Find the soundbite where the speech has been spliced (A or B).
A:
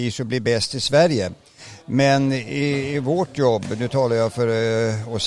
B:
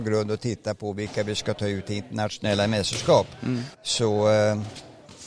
B